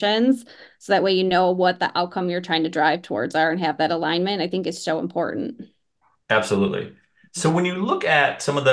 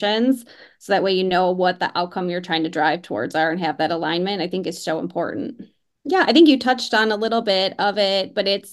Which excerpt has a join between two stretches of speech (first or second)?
second